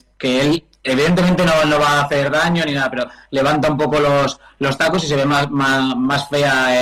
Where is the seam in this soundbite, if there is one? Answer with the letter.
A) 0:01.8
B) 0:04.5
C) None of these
C